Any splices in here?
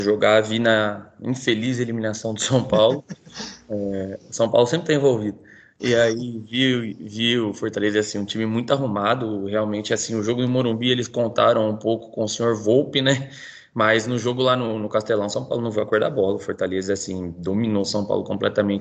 no; 0 cuts

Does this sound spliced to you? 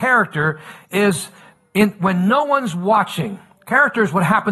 no; 0 cuts

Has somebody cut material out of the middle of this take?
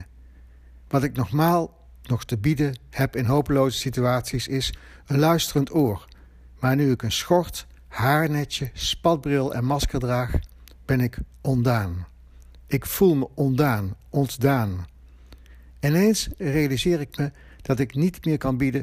no; 0 cuts

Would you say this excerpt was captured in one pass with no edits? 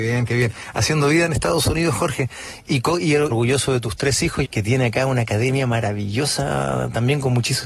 no; 2 cuts; at 3.3 s, 4.4 s

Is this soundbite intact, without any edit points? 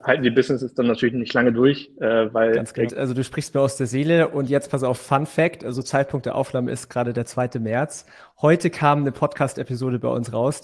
no; 1 cut; at 2.9 s

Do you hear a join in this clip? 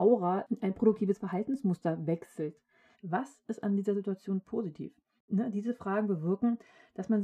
yes; 2 cuts; at 2.9 s, 5.2 s

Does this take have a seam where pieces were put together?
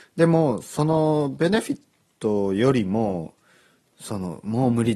no; 0 cuts

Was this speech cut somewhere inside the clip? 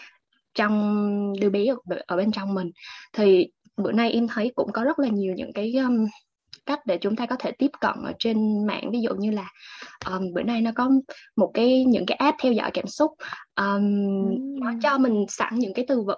no; 0 cuts

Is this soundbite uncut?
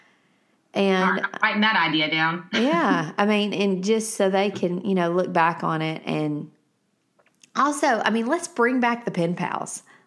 yes; 0 cuts

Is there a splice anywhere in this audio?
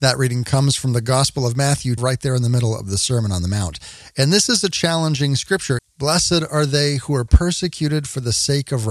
yes; 2 cuts; at 2.0 s, 5.8 s

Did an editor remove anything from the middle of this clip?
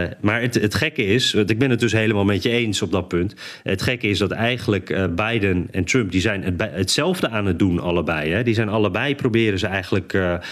no; 0 cuts

